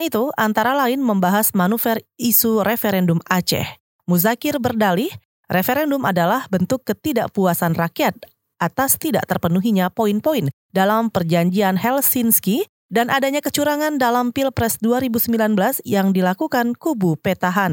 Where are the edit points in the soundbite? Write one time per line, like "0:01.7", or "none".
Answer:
none